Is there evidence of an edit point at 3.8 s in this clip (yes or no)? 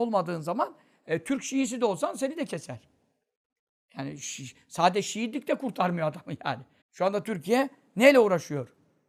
no